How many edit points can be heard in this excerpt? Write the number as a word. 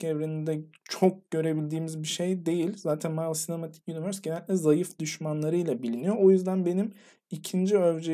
zero